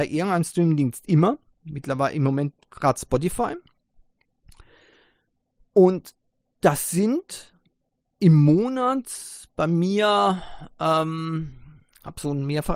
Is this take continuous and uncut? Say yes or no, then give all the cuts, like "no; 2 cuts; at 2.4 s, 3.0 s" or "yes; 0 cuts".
yes; 0 cuts